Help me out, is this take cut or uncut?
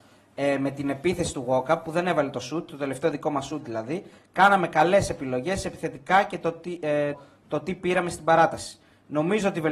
cut